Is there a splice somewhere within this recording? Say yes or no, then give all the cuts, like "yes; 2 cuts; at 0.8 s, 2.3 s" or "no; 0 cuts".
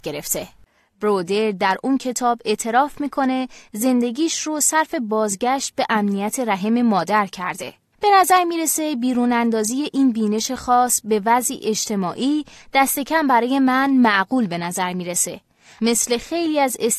yes; 1 cut; at 15.8 s